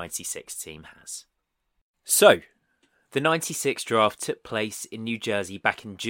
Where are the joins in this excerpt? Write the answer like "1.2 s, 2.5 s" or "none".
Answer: none